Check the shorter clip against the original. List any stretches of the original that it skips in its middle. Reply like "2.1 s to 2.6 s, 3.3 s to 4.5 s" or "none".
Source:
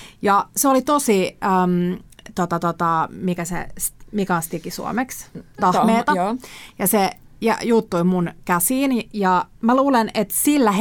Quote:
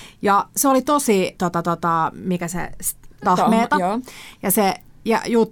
1.4 s to 2.3 s, 4.1 s to 5.5 s

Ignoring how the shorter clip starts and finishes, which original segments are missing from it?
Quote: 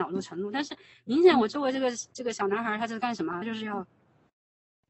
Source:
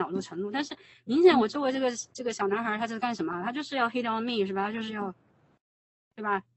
3.4 s to 4.7 s

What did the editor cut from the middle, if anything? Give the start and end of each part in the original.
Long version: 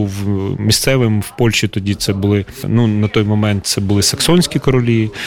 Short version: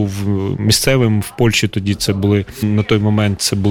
2.6 s to 2.9 s

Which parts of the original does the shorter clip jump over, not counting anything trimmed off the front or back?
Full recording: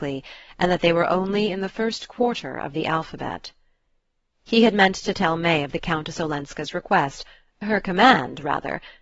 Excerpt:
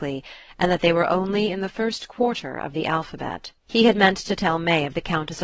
3.6 s to 4.4 s

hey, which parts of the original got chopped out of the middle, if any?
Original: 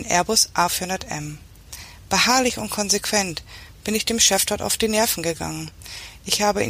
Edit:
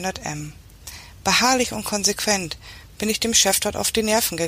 none

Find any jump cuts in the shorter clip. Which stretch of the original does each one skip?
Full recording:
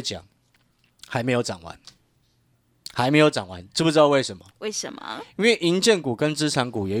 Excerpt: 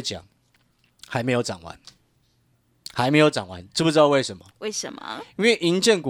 none

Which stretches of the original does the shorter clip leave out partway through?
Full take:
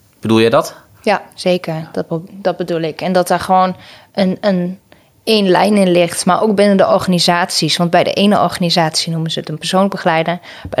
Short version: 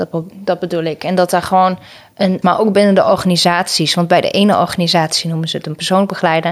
4.4 s to 6.2 s

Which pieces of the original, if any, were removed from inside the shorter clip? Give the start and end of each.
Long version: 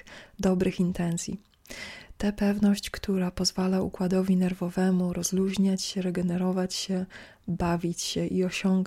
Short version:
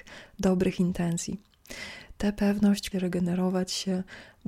2.9 s to 5.9 s

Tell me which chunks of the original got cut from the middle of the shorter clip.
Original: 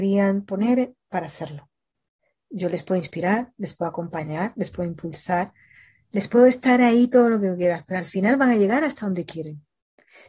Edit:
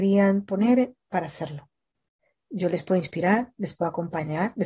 none

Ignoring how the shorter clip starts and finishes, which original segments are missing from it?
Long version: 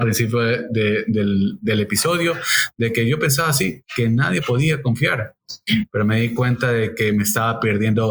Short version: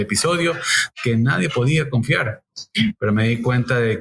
2.7 s to 3.9 s

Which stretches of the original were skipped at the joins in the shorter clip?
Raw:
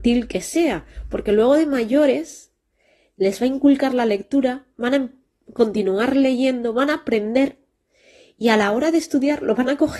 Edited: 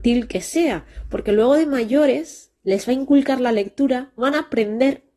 2.6 s to 3.1 s, 4.7 s to 6.7 s

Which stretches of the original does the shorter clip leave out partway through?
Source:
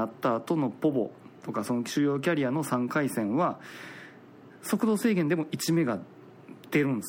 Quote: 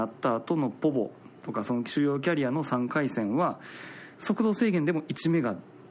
4.1 s to 4.6 s

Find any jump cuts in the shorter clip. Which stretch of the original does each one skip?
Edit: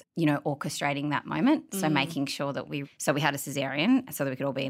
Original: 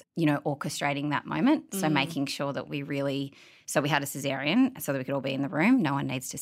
2.8 s to 3.5 s

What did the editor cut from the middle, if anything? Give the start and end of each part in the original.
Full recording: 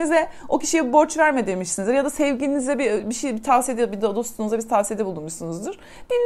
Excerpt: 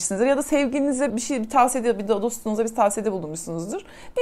2.8 s to 3.0 s

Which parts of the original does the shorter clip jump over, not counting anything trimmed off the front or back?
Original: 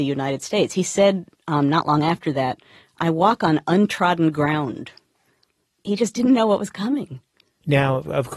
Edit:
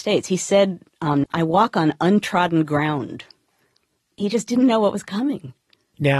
1.7 s to 2.9 s

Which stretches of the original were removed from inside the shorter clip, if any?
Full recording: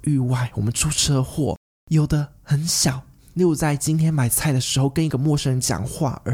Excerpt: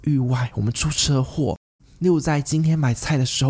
1.8 s to 3.1 s

